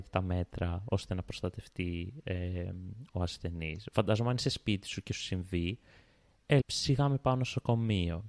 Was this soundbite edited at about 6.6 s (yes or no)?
yes